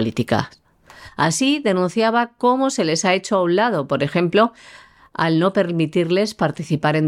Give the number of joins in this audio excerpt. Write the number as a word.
zero